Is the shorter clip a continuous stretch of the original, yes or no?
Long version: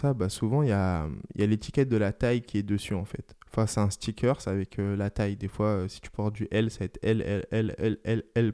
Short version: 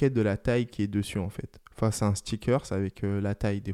yes